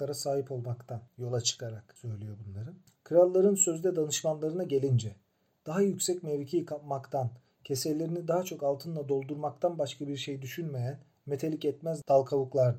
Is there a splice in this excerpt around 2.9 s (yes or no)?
yes